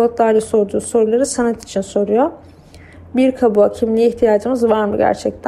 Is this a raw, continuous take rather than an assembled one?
yes; 0 cuts

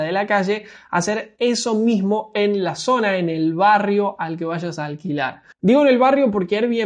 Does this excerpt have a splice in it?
yes; 1 cut; at 5.5 s

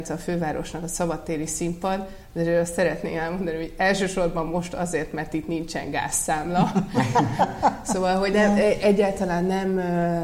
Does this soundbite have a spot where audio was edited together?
no; 0 cuts

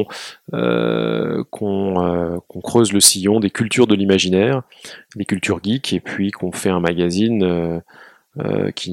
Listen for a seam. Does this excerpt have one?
no; 0 cuts

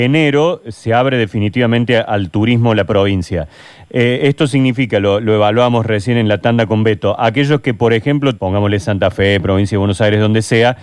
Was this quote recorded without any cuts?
no; 1 cut; at 8.4 s

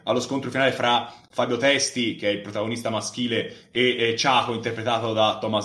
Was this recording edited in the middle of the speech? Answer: no; 0 cuts

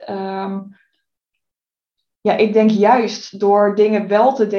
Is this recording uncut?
yes; 0 cuts

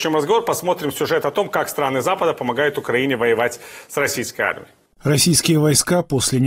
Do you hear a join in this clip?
no; 0 cuts

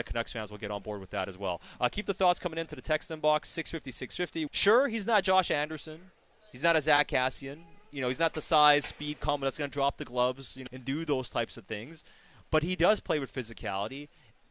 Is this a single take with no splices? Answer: no; 2 cuts; at 4.5 s, 10.7 s

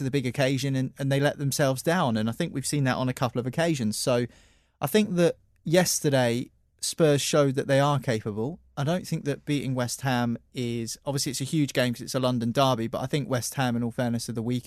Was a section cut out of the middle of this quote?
no; 0 cuts

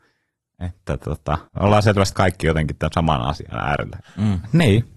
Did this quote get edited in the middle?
yes; 2 cuts; at 1.5 s, 4.0 s

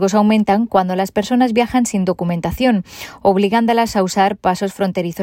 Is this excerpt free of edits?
yes; 0 cuts

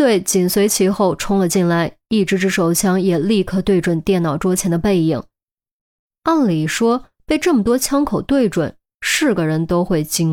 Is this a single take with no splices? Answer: yes; 0 cuts

